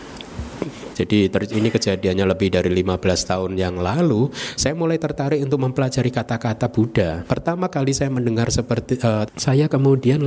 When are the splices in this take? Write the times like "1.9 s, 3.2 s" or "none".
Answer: 0.9 s, 7.2 s, 9.3 s